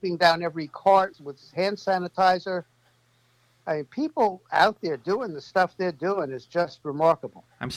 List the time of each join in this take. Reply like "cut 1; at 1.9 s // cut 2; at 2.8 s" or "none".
cut 1; at 1.1 s